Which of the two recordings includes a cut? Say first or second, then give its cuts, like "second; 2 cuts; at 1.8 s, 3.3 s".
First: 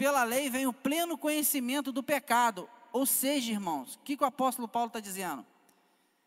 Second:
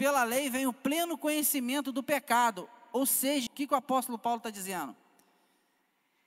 second; 1 cut; at 3.5 s